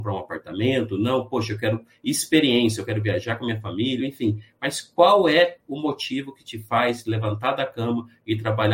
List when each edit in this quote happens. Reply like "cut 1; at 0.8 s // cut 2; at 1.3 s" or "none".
cut 1; at 4.0 s